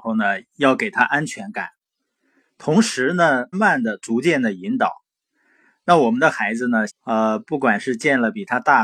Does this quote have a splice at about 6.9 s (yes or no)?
yes